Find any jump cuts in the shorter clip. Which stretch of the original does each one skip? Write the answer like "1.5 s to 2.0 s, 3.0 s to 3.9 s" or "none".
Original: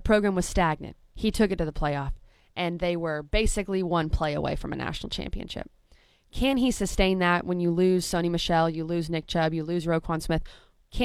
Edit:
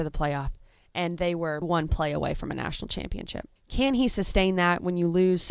3.2 s to 3.8 s, 5.8 s to 6.2 s